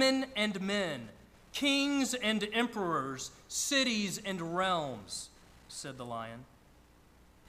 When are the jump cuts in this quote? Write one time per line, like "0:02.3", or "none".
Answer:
none